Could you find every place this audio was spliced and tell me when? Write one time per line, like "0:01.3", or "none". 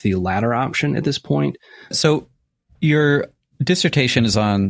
0:01.9

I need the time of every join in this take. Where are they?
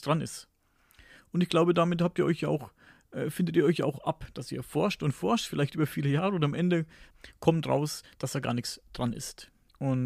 none

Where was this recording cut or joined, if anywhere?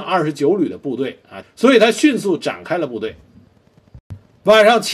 0:01.4

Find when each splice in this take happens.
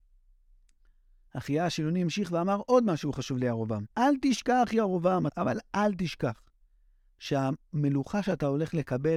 0:03.9
0:05.3

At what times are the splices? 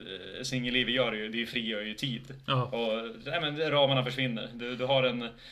none

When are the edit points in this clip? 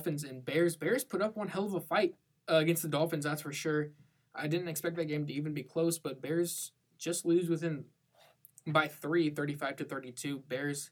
none

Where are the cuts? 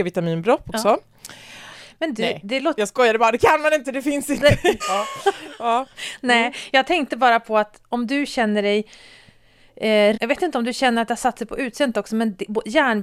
0:04.8
0:10.1

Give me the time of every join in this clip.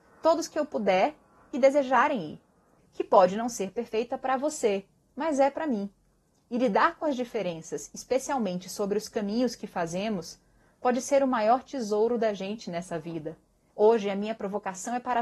0:02.8
0:13.7

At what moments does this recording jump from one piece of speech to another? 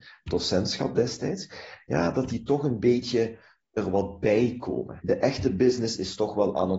0:05.0

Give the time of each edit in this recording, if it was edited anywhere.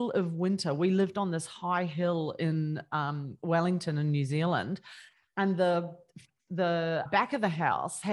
0:07.1

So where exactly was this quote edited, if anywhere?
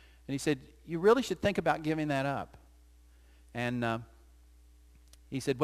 none

